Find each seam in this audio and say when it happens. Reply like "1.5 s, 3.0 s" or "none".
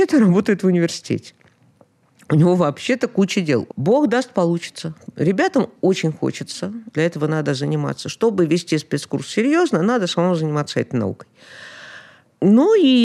3.7 s, 6.9 s